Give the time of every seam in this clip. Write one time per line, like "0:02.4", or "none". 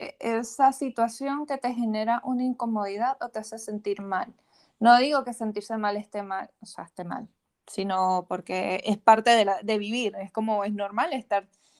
none